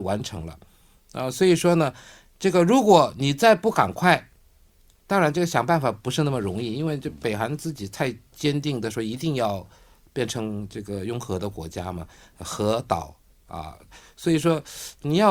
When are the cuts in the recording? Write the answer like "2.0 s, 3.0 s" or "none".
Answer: none